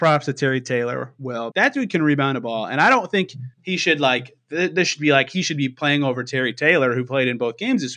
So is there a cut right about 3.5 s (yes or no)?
yes